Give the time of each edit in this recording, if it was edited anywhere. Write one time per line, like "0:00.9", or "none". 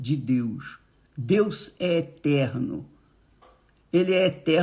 none